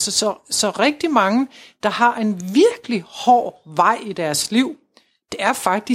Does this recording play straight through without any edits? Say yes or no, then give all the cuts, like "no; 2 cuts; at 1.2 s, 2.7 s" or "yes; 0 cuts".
yes; 0 cuts